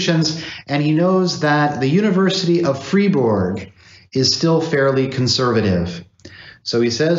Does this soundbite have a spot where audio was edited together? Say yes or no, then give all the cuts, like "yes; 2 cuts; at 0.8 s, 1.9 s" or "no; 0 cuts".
no; 0 cuts